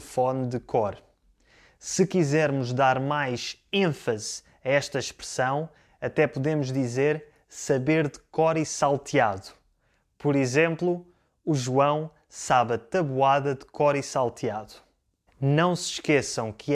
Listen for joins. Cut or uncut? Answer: uncut